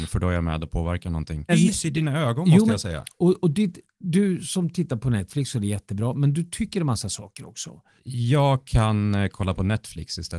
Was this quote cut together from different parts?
yes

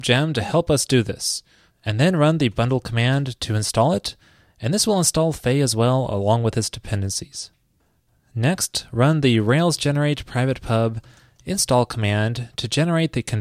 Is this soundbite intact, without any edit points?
no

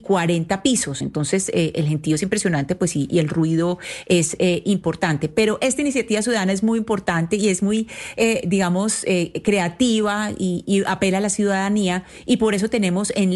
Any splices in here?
no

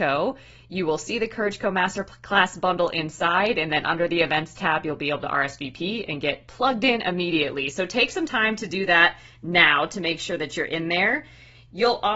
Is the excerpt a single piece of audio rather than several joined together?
yes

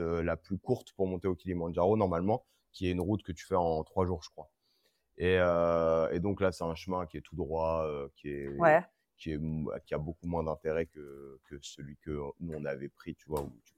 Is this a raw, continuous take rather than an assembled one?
yes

